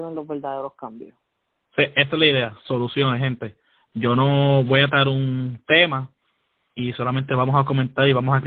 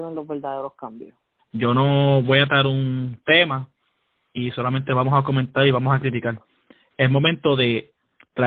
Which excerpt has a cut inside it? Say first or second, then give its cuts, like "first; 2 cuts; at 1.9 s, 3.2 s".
second; 1 cut; at 1.4 s